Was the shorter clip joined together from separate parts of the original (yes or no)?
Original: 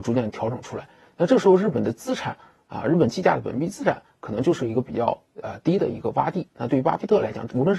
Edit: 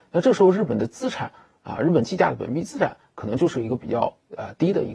no